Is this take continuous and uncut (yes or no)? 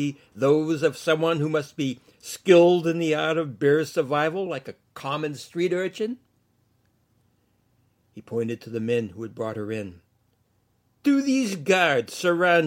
yes